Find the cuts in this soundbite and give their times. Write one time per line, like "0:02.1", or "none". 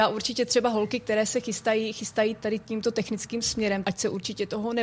0:03.8